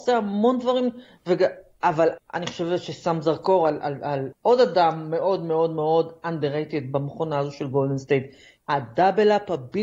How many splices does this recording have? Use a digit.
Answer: 3